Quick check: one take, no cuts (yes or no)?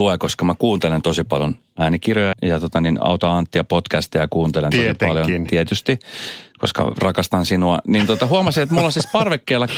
no